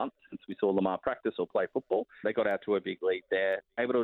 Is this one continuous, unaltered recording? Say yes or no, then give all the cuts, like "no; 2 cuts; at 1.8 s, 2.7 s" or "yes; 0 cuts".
no; 1 cut; at 2.2 s